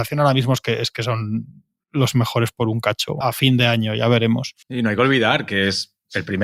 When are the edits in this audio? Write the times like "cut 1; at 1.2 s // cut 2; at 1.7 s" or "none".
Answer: cut 1; at 3.2 s // cut 2; at 4.6 s